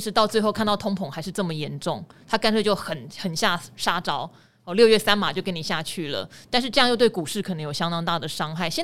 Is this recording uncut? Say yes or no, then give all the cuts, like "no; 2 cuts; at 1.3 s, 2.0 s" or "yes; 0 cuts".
yes; 0 cuts